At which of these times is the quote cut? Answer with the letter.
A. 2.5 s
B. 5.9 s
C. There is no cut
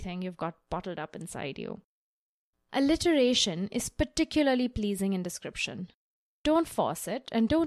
A